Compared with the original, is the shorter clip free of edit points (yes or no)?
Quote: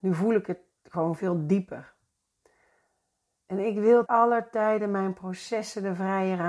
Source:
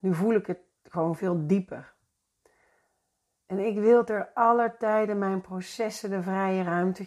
no